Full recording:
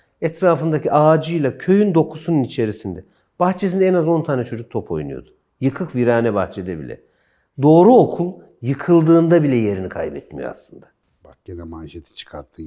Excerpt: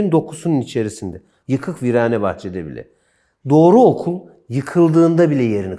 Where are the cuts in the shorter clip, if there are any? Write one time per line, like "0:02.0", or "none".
0:01.4